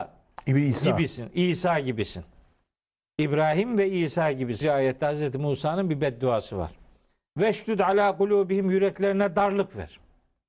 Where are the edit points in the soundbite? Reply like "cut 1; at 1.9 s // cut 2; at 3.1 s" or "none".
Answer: cut 1; at 4.6 s // cut 2; at 7.3 s